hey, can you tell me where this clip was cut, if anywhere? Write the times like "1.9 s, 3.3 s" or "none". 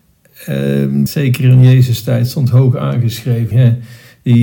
1.1 s, 3.5 s